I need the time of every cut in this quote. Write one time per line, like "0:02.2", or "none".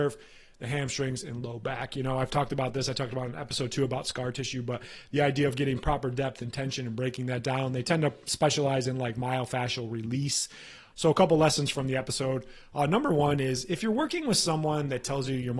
0:10.9